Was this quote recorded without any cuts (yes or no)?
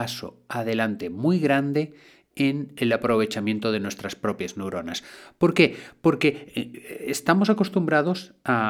yes